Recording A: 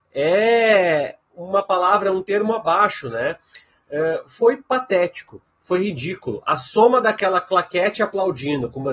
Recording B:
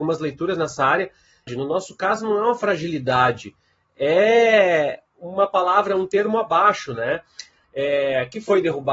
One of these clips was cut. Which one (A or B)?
B